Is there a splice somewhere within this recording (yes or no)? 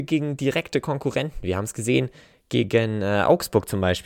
no